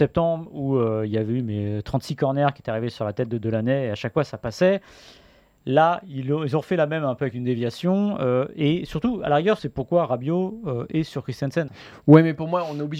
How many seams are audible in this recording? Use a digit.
2